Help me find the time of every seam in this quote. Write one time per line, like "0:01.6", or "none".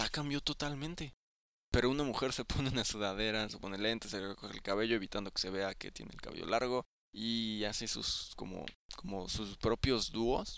0:03.5
0:08.8